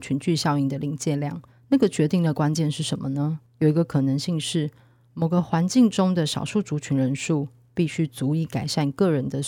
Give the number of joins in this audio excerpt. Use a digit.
0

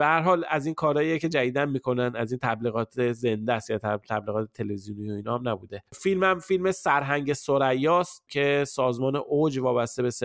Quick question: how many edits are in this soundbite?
1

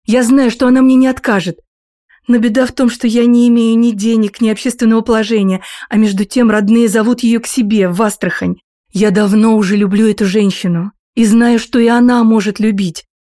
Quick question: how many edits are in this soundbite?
1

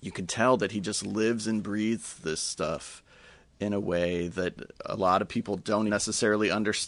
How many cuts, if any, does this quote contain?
1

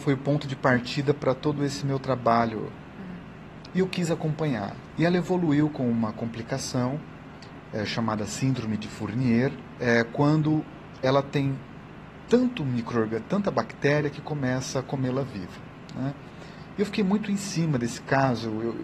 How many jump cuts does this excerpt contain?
2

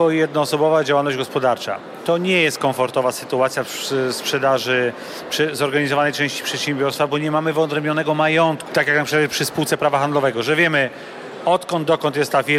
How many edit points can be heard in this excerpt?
1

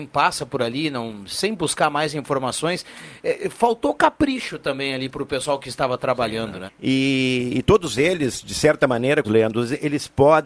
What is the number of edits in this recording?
2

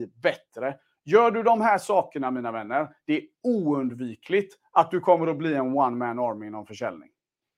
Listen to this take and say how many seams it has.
0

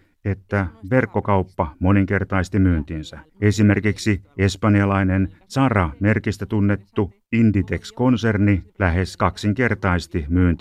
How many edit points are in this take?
2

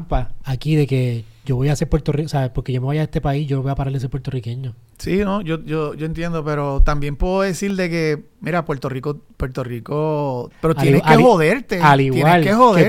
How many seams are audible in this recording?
1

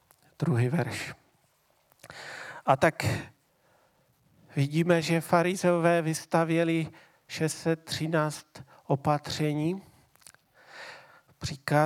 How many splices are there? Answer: 0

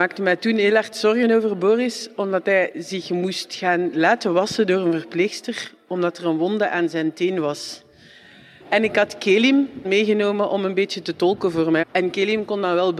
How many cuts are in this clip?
3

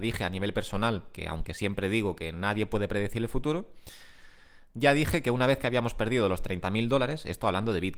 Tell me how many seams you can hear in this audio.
0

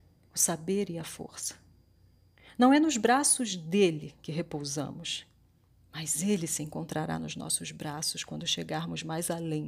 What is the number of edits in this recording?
0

